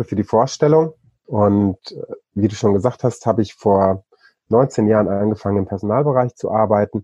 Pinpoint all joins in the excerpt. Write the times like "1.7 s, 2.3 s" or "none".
1.1 s

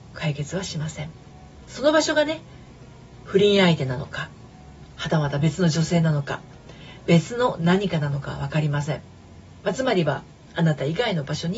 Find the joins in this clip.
1.6 s

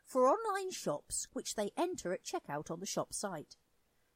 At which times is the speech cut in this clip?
1.3 s

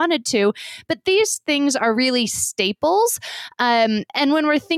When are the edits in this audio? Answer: none

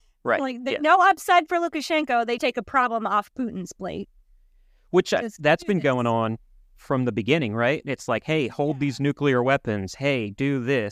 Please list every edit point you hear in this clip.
2.4 s

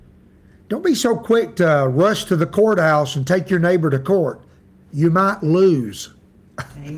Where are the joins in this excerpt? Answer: none

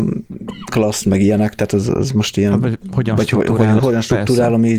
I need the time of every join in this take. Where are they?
3.8 s

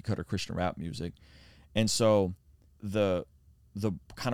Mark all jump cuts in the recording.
2.8 s

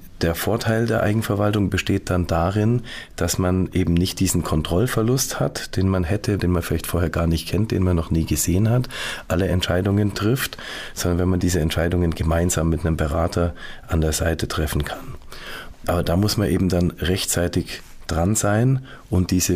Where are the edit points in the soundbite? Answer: 6.4 s

